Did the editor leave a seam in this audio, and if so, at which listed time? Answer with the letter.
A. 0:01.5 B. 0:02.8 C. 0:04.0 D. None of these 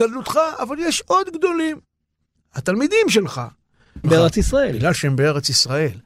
C